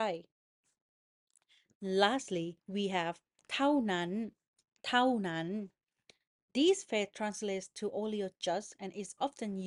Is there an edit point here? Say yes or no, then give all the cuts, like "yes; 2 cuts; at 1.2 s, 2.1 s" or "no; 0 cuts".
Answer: yes; 1 cut; at 2.6 s